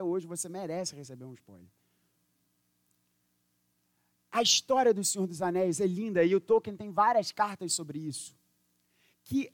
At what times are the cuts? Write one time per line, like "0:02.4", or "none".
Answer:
none